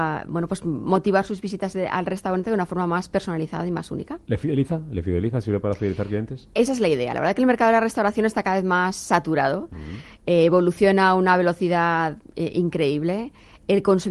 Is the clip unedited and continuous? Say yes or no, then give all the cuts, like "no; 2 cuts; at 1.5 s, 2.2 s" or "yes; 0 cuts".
yes; 0 cuts